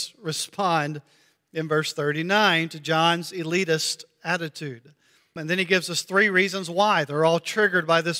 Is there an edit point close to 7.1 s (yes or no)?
no